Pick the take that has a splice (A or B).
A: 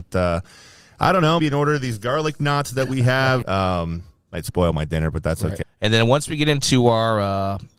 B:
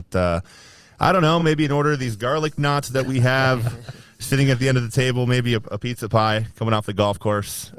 A